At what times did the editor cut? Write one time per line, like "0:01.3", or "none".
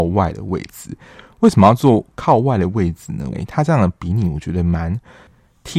0:03.3